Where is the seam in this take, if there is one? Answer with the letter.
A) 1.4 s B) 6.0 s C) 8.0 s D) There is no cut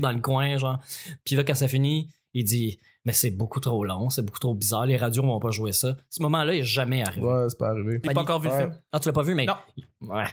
C